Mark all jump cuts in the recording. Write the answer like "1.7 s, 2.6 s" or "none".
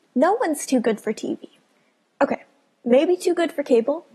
none